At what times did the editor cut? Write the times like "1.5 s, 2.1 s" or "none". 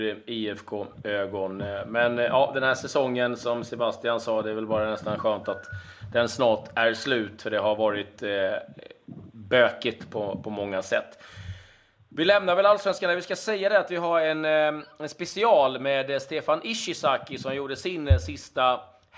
none